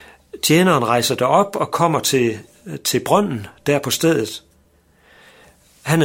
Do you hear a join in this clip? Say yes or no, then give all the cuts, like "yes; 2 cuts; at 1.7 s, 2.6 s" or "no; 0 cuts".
no; 0 cuts